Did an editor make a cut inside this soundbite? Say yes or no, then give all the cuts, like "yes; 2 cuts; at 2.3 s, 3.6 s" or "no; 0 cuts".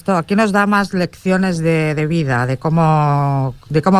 no; 0 cuts